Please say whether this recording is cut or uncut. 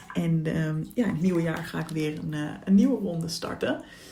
uncut